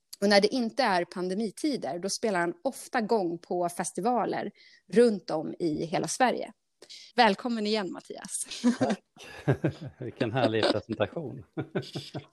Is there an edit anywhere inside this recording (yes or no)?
yes